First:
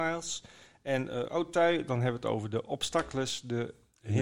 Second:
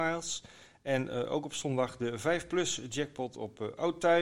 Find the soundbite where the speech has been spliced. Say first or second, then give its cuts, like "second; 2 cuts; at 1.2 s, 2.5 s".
first; 1 cut; at 1.3 s